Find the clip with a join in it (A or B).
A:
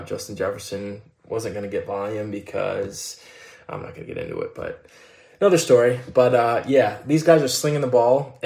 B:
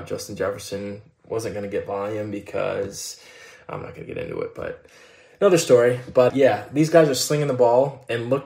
B